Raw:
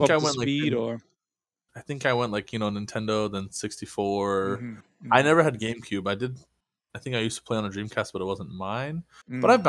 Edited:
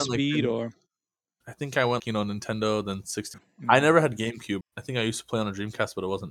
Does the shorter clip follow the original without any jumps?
no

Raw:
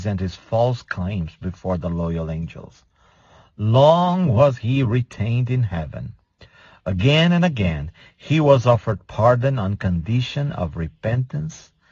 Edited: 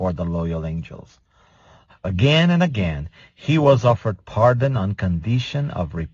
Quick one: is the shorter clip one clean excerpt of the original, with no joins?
no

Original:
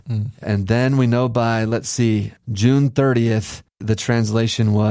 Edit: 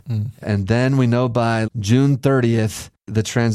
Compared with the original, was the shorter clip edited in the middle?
yes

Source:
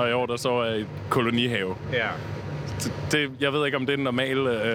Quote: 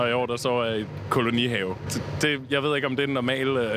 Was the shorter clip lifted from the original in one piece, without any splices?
no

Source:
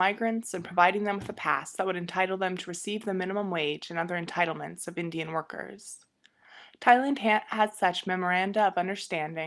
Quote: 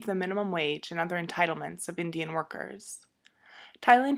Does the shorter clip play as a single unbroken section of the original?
yes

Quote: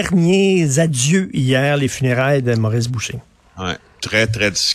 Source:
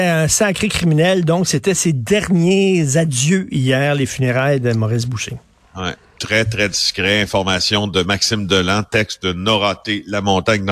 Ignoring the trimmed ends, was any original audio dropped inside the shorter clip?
no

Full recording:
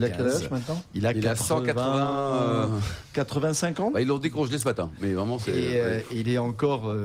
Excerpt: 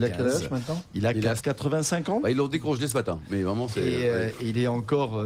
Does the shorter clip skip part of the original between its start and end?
yes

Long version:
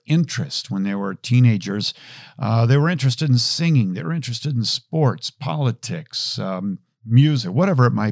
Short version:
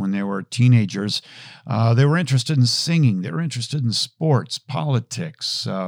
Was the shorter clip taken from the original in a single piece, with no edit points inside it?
yes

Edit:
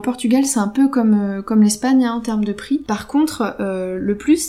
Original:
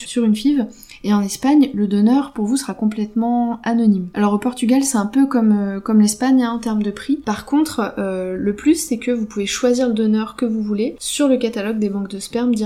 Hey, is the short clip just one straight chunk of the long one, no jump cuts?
yes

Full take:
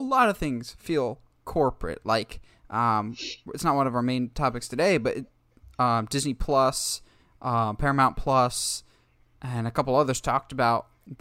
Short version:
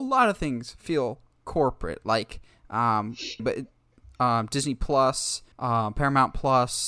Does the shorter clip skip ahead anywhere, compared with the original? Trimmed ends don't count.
yes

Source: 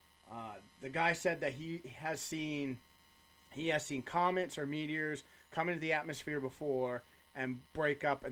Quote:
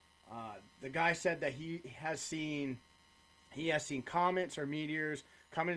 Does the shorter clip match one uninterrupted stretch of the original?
yes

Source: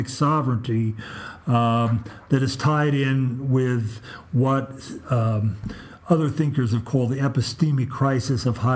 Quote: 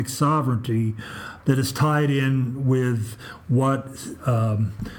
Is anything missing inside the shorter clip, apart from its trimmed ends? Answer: yes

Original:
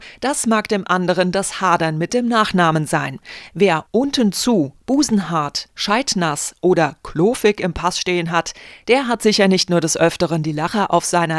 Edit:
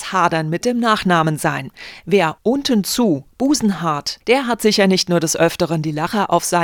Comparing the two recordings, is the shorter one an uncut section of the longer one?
no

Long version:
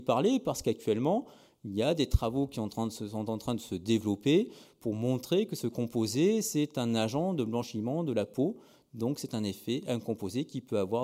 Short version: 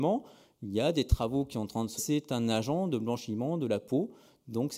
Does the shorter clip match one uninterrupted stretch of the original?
no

